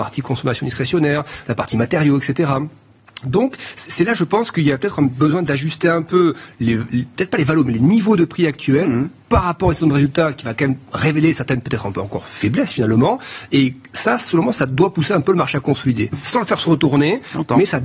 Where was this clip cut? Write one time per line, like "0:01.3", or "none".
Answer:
none